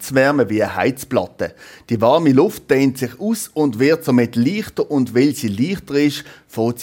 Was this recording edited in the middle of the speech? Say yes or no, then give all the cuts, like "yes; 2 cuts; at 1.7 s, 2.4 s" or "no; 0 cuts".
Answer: no; 0 cuts